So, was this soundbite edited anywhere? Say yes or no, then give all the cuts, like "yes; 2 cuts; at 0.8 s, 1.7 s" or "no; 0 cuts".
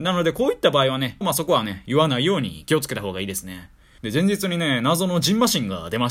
yes; 2 cuts; at 1.2 s, 4.0 s